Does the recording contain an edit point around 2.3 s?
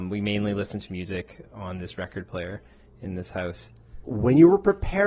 no; 1 cut; at 4.0 s

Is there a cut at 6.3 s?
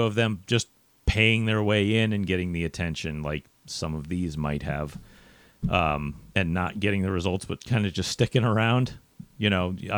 yes; 1 cut; at 6.3 s

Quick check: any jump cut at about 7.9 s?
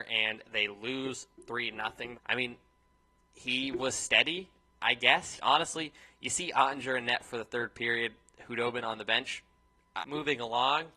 no; 3 cuts; at 2.1 s, 5.4 s, 10.0 s

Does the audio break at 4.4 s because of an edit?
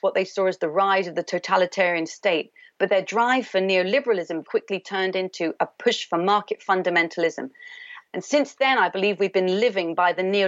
yes; 2 cuts; at 4.4 s, 8.0 s

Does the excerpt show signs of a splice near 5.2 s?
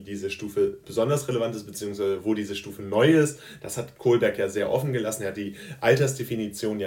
no; 1 cut; at 3.6 s

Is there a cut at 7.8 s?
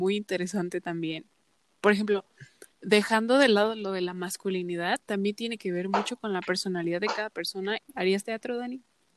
yes; 2 cuts; at 2.7 s, 7.8 s

